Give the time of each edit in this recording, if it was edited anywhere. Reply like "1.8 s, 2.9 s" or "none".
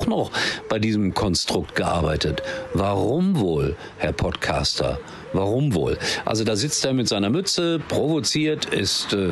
none